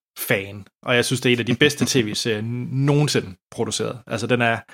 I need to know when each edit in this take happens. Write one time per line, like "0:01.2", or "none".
none